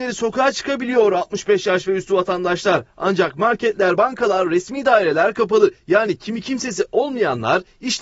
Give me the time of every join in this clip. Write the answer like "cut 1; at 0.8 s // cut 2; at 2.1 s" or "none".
none